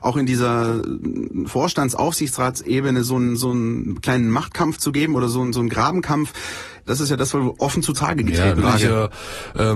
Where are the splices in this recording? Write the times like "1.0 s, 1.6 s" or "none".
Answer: 6.9 s, 8.6 s